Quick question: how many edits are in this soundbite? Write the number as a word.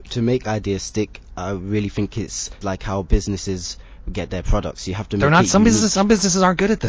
one